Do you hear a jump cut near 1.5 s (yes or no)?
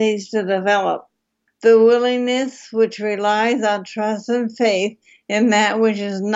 yes